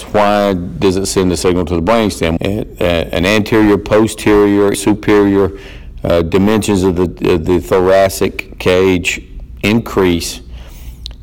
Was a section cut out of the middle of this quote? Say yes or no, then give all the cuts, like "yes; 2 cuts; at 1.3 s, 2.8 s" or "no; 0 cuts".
yes; 2 cuts; at 2.4 s, 4.7 s